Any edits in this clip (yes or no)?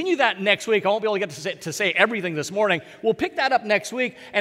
no